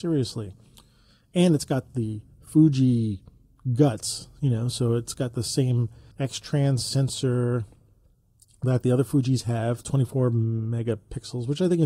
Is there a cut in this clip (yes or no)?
yes